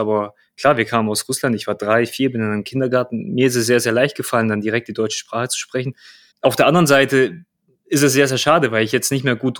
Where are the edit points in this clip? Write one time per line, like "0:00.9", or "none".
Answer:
0:06.3